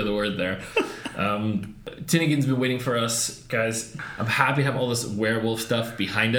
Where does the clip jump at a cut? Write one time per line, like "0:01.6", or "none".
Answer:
none